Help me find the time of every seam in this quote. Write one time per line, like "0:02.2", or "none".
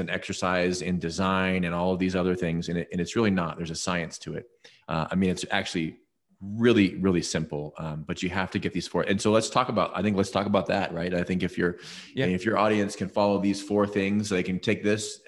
0:04.8